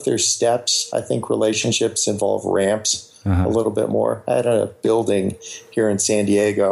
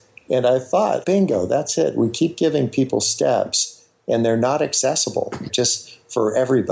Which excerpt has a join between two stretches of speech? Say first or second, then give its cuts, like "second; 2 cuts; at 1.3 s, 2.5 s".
second; 2 cuts; at 1.0 s, 5.5 s